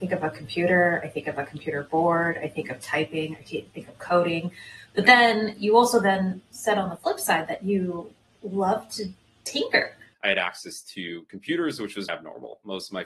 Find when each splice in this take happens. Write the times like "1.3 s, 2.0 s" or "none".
10.1 s, 12.1 s

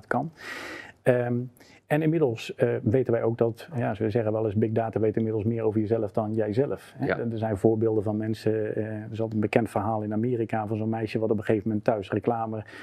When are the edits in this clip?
none

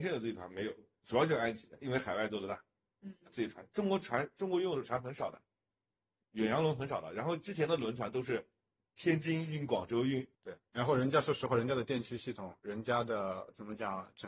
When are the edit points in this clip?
10.3 s

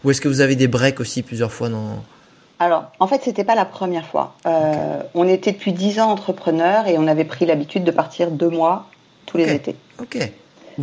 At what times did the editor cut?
none

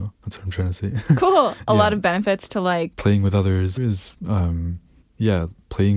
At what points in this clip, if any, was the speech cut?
3.8 s

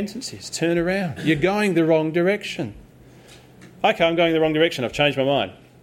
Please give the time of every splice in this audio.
none

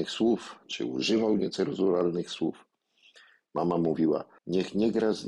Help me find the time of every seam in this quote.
4.4 s

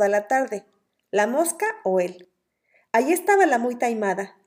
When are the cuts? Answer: none

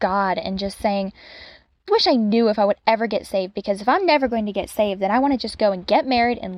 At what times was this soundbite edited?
1.9 s

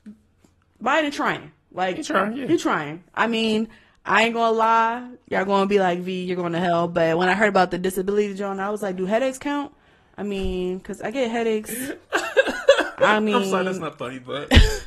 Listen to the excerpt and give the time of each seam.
none

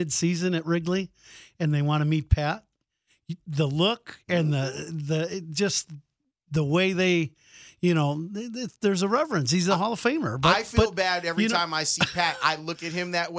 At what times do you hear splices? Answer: none

